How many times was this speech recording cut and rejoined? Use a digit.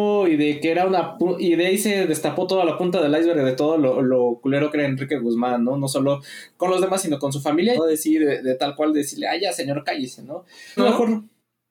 2